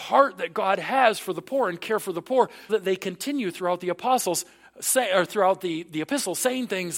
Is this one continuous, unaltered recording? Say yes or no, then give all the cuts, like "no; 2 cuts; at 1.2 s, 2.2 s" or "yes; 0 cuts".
no; 1 cut; at 2.7 s